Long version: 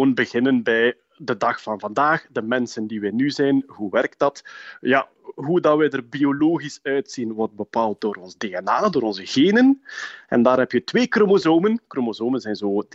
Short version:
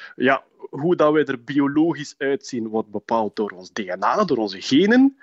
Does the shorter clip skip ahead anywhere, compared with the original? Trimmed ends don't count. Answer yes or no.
no